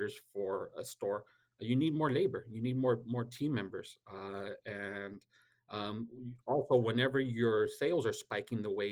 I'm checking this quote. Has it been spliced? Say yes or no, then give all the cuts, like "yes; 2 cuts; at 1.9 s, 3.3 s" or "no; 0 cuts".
no; 0 cuts